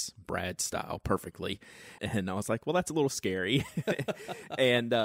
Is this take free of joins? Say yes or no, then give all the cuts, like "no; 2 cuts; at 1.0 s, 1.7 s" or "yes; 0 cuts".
no; 1 cut; at 2.0 s